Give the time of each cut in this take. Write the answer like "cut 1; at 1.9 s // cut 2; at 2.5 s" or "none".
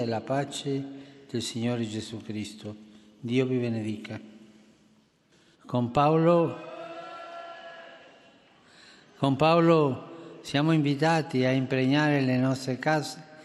cut 1; at 5.5 s